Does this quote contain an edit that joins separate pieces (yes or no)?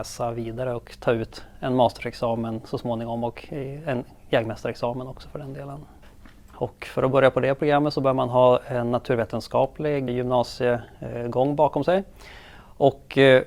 yes